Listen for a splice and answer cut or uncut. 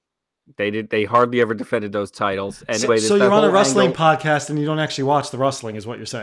cut